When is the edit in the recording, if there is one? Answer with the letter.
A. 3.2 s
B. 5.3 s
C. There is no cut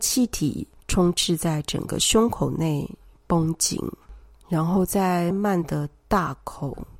B